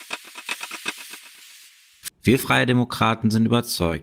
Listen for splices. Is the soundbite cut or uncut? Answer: cut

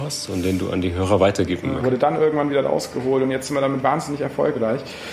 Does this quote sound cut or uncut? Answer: cut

